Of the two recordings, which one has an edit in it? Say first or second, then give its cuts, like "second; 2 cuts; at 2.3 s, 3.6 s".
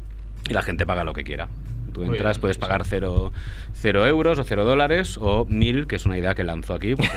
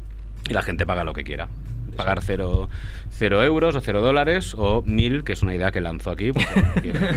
second; 1 cut; at 1.9 s